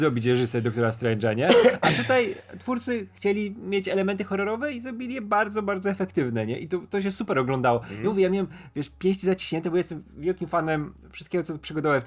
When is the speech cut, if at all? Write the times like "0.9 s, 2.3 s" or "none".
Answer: none